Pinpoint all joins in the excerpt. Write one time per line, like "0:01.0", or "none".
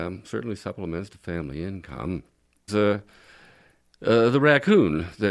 0:02.7

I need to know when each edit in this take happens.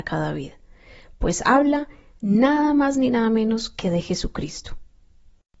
none

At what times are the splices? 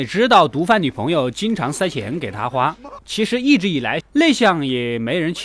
0:03.0
0:04.0

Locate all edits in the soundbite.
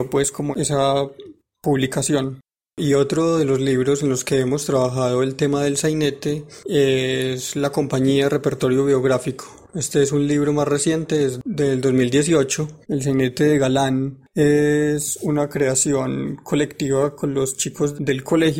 0:12.8

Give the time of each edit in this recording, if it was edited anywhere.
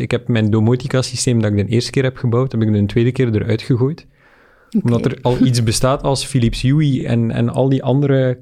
none

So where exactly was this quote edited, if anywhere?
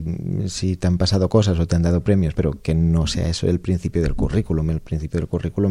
0:02.3

